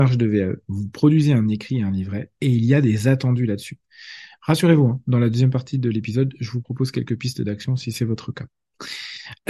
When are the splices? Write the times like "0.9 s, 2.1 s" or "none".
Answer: none